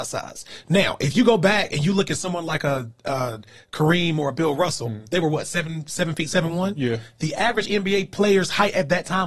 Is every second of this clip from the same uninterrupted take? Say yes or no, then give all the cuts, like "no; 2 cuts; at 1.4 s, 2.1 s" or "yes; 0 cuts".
yes; 0 cuts